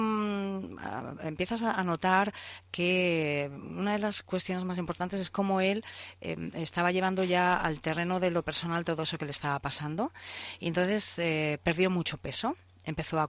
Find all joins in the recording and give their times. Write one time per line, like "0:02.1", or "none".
none